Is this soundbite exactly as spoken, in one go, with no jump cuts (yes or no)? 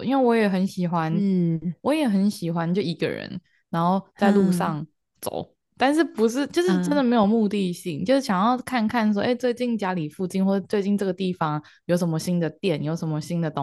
yes